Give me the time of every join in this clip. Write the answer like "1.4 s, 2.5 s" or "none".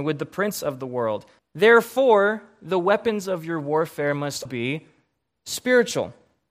1.4 s, 4.5 s